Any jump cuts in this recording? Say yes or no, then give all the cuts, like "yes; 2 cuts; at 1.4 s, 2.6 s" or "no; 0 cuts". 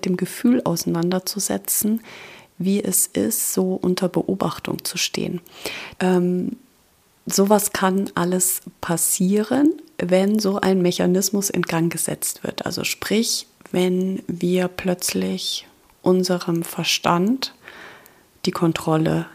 yes; 1 cut; at 6.0 s